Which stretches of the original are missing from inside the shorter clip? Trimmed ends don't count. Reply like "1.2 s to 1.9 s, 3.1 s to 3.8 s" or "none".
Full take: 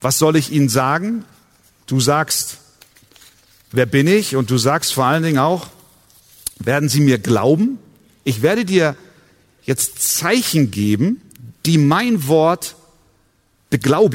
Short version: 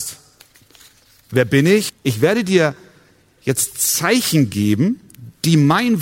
4.3 s to 8.1 s